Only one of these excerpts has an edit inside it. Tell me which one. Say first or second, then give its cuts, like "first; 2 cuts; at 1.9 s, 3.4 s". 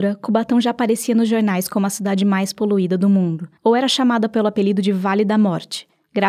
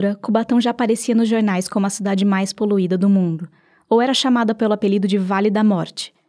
first; 1 cut; at 3.6 s